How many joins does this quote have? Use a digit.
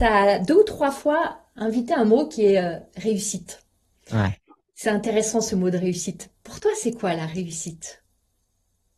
0